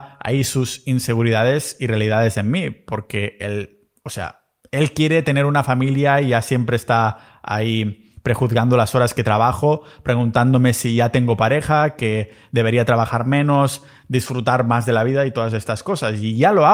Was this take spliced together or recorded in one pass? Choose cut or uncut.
uncut